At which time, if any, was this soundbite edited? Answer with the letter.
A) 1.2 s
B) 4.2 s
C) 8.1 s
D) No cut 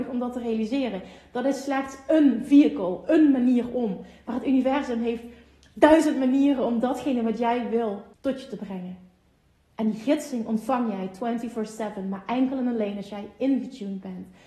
C